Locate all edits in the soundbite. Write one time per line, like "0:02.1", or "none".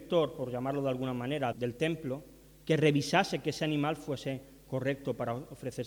0:01.5

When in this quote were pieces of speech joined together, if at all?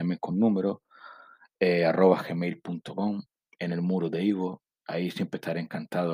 none

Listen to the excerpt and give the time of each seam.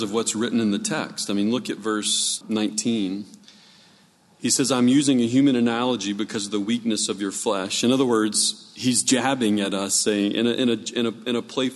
0:02.4

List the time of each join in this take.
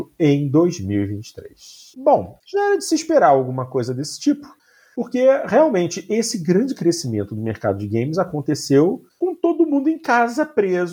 0:01.9

